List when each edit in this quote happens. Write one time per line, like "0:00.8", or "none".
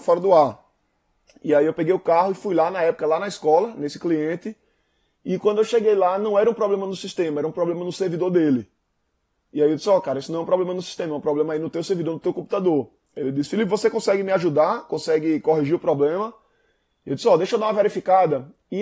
none